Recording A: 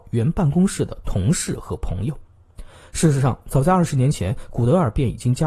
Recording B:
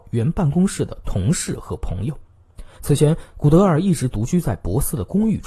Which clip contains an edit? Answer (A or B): B